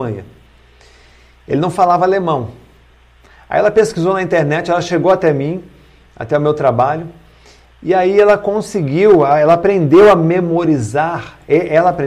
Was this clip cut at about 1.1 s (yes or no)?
no